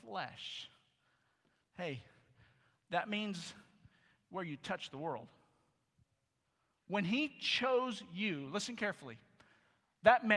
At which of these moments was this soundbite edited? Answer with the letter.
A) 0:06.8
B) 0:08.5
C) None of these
A